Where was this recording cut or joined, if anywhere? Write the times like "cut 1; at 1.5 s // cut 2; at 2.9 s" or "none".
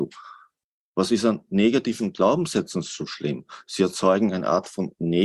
none